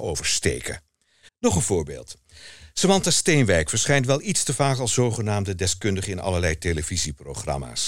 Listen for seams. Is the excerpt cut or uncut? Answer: cut